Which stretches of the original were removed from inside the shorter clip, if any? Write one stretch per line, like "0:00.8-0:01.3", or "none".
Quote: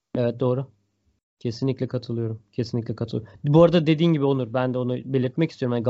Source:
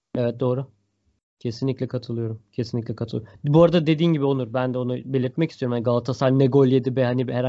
none